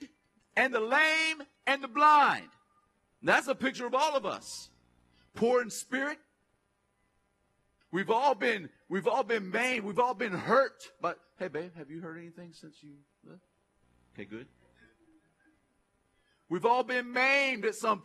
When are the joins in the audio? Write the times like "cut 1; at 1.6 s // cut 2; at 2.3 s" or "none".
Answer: cut 1; at 7.8 s